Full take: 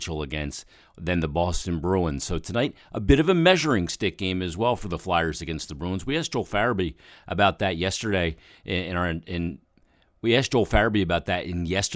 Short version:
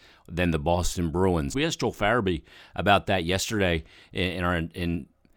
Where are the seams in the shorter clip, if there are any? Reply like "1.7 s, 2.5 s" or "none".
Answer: 1.5 s